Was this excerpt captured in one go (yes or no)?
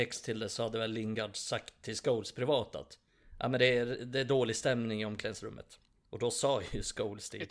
yes